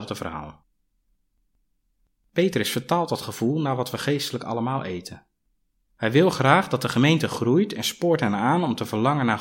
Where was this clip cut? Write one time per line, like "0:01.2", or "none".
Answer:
none